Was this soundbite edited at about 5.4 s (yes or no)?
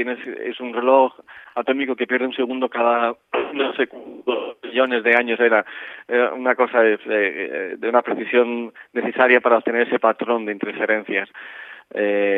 no